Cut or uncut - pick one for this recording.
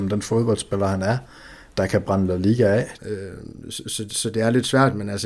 cut